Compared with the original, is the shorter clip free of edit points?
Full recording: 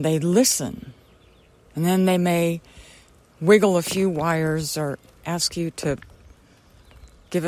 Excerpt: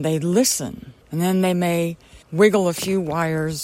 no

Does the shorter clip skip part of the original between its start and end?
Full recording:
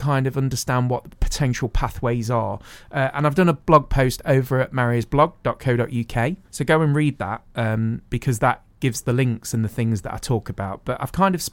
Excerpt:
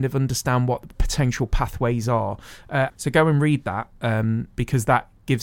yes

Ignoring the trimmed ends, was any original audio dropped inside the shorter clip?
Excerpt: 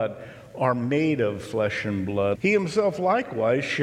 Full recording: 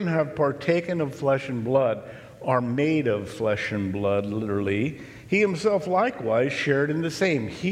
yes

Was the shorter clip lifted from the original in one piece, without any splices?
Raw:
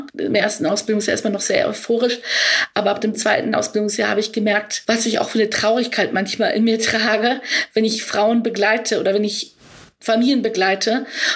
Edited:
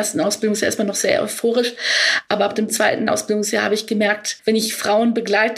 no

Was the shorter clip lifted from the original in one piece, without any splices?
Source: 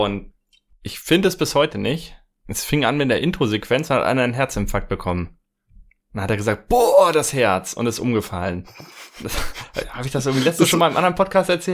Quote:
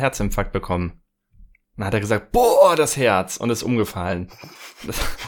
yes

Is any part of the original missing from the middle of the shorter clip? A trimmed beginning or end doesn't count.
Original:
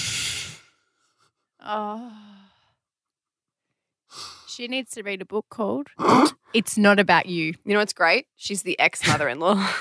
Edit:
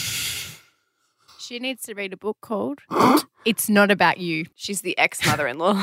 yes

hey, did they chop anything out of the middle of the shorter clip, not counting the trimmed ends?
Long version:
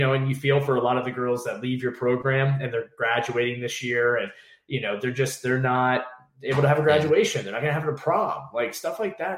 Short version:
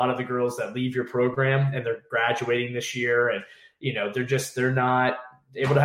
no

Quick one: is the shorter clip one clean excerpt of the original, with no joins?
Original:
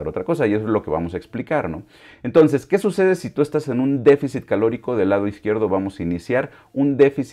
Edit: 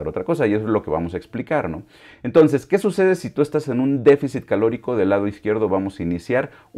yes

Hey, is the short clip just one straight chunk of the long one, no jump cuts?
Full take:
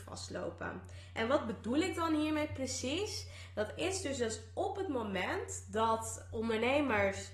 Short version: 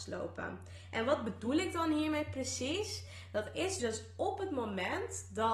no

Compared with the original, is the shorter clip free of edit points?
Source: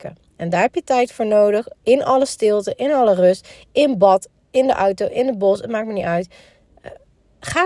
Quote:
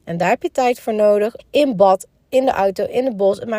no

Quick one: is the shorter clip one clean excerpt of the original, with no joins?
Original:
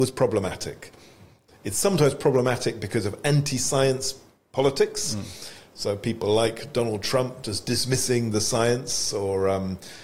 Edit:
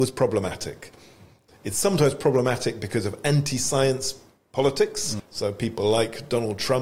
no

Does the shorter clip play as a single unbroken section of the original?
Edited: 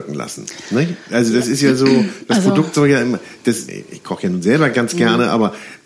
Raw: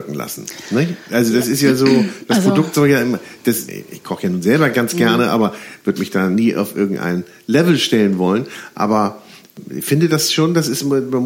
yes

